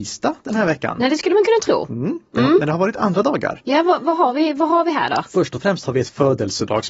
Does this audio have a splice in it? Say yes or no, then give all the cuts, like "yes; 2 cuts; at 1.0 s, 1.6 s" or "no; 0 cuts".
no; 0 cuts